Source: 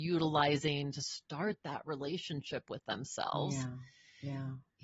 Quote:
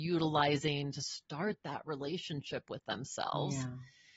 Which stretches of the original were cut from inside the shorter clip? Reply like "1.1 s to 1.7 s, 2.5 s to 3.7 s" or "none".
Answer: none